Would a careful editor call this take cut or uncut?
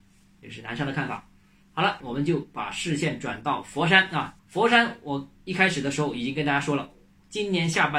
cut